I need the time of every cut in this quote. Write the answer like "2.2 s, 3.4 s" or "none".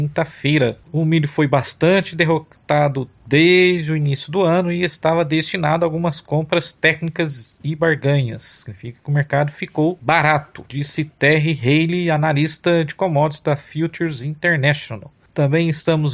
8.6 s